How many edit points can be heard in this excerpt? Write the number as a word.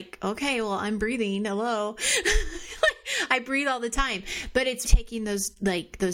one